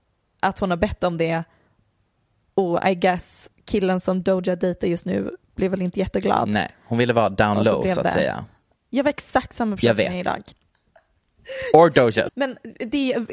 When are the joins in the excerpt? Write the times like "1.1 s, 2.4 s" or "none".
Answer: 8.8 s, 10.5 s, 12.3 s

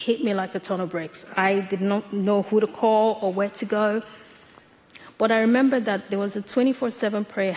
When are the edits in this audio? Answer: 1.3 s

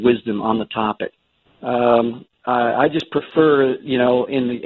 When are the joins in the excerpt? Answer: 1.5 s

